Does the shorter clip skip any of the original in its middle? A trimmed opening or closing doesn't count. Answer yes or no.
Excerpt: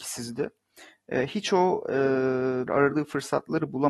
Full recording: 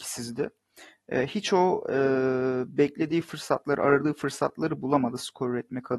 yes